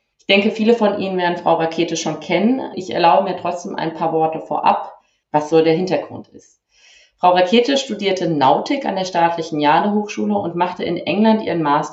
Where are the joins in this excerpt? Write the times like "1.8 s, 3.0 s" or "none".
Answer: 5.2 s